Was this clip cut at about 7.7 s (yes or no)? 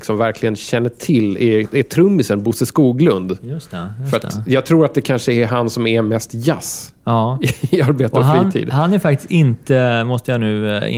no